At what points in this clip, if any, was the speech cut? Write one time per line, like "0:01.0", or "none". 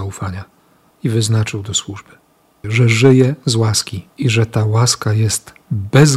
0:02.6
0:04.1